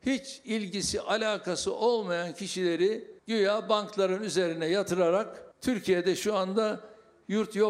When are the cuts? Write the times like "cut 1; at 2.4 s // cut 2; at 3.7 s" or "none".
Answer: cut 1; at 3.2 s // cut 2; at 5.5 s